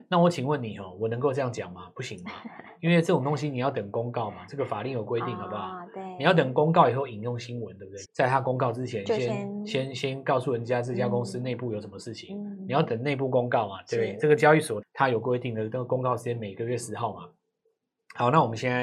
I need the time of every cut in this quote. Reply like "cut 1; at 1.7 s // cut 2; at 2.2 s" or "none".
cut 1; at 8.0 s // cut 2; at 14.8 s